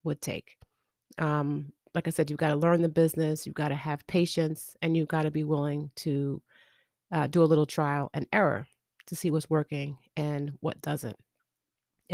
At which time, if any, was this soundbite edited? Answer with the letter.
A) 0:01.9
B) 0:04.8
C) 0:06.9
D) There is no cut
D